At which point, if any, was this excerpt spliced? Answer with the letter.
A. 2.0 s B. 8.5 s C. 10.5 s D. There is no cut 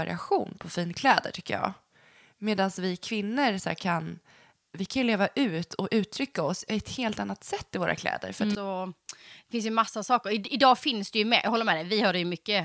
B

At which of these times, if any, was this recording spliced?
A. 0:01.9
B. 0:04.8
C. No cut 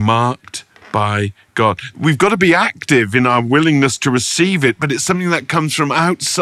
A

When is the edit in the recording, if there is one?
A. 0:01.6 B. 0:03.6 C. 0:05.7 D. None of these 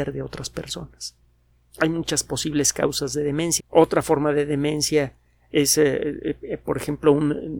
B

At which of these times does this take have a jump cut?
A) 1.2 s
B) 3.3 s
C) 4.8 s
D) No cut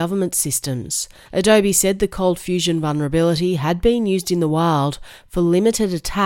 A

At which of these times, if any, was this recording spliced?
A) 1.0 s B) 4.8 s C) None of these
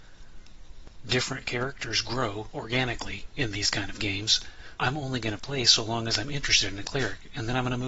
B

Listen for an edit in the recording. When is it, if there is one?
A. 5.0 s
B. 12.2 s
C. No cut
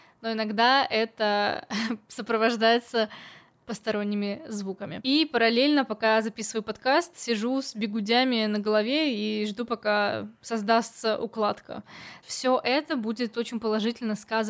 B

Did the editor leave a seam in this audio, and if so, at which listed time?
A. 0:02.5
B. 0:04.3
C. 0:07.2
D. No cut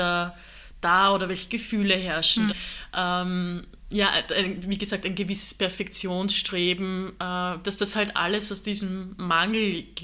A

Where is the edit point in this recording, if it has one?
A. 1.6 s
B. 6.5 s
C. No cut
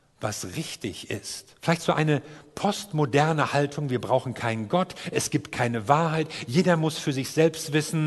A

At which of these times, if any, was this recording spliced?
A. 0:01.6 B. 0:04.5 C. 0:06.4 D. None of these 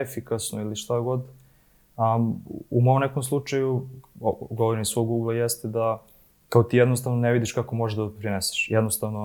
D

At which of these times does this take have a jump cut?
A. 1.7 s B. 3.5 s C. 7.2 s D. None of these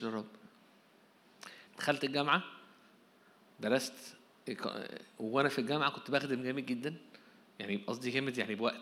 A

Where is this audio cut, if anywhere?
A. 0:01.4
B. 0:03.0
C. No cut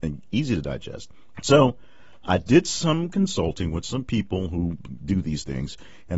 A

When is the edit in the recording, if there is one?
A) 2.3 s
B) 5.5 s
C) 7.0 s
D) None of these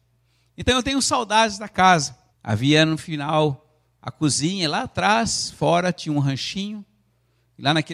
A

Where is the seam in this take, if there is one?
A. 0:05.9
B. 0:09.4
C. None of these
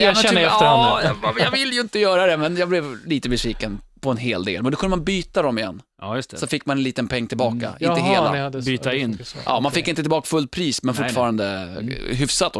C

